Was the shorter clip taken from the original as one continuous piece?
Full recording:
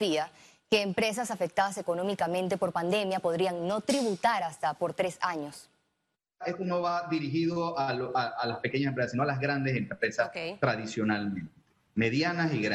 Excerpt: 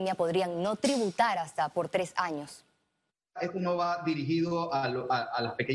yes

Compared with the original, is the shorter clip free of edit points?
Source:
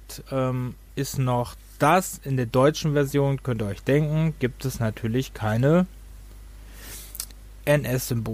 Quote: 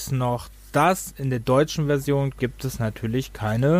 no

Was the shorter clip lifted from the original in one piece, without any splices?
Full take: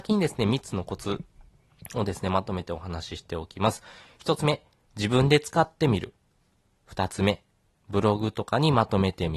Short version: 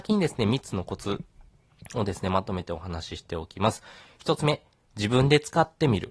yes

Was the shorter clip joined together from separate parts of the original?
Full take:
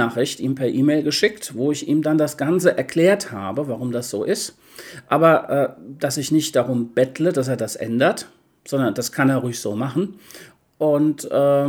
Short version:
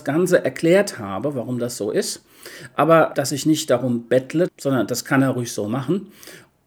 yes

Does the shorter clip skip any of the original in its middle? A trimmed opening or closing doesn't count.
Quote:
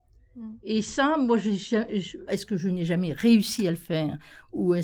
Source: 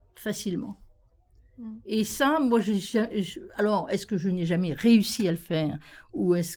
yes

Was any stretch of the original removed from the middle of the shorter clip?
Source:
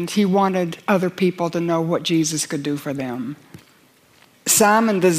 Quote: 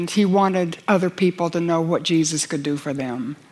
no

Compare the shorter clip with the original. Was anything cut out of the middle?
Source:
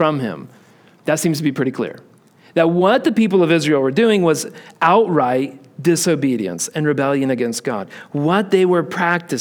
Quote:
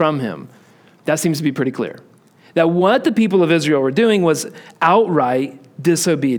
no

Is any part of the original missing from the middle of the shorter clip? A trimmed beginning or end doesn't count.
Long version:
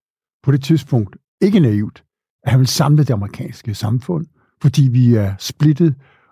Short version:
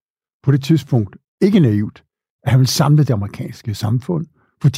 no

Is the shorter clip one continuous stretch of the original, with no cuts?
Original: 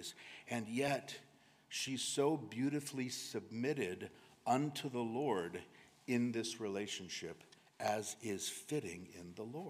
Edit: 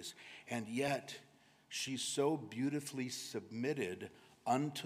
yes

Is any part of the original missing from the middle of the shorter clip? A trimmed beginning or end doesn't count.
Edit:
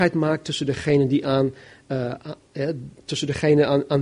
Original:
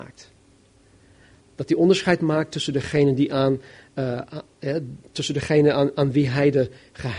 no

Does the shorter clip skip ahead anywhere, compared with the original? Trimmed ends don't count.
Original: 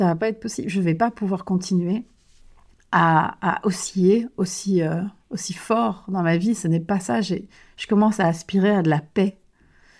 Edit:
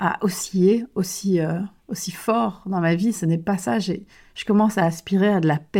no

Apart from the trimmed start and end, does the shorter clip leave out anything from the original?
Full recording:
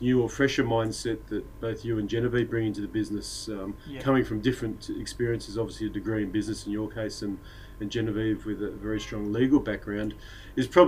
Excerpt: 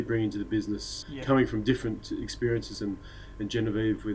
yes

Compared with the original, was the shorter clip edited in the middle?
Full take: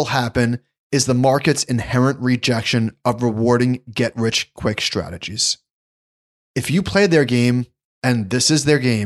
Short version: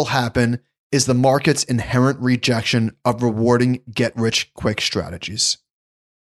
no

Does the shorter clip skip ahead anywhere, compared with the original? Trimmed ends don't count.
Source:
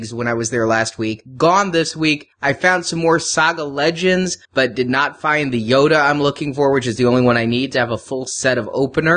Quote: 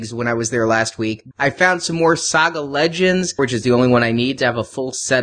yes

